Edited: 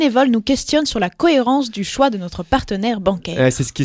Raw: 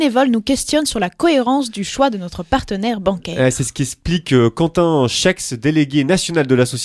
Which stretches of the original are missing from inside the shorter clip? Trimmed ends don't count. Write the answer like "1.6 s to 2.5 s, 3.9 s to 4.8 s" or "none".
none

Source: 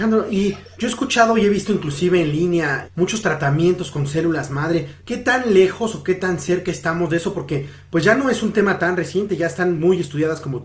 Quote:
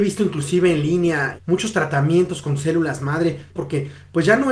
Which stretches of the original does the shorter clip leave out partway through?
5.0 s to 7.3 s

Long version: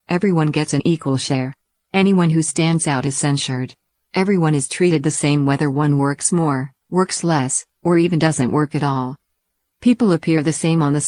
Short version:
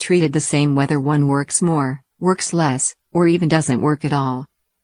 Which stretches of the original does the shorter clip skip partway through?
none

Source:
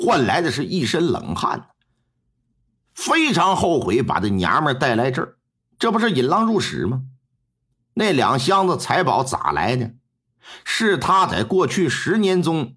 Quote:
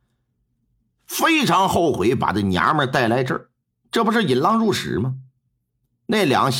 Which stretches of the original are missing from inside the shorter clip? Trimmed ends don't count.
none

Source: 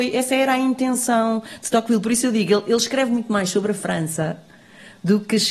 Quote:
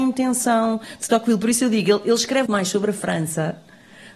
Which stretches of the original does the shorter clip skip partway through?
3.1 s to 3.3 s

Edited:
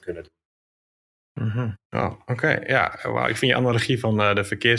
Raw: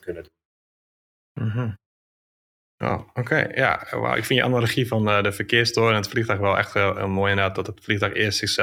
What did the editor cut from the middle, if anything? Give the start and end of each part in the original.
1.9 s to 2.7 s

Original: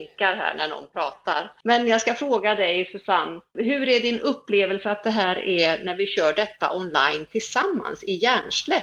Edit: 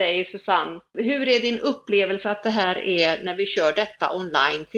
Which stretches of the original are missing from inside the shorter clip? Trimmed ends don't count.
none

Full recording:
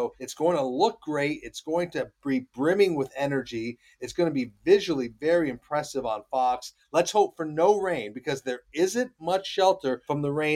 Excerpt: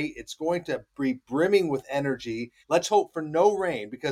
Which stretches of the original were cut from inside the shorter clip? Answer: 3.9 s to 6.8 s

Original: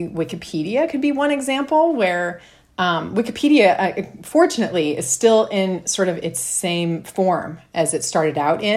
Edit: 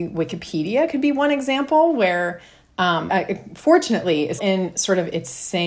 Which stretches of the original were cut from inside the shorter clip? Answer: 3.1 s to 3.8 s, 5.1 s to 5.5 s

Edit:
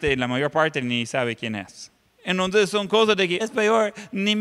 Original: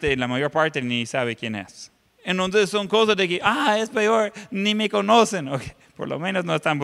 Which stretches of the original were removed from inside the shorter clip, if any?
3.4 s to 3.8 s

